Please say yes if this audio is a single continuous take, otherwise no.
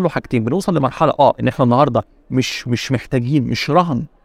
yes